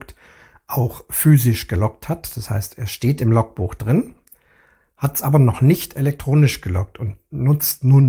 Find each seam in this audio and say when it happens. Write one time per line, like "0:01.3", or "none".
none